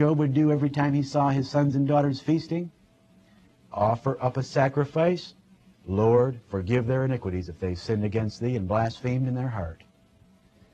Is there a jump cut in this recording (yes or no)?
no